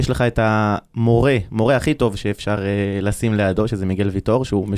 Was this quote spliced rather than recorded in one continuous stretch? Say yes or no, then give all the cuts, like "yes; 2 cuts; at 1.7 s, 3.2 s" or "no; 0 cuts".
no; 0 cuts